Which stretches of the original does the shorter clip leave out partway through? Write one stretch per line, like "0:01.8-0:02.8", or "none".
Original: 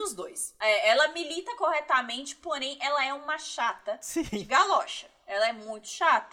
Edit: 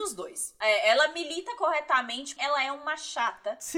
0:02.4-0:02.8